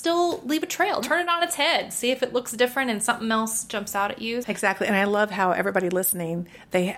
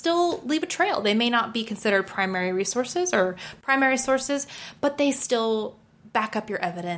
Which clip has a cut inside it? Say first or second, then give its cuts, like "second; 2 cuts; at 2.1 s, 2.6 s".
first; 2 cuts; at 1.0 s, 4.4 s